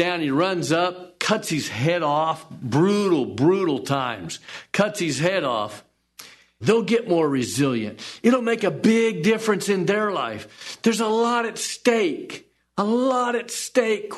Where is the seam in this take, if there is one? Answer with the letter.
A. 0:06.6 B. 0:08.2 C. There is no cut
A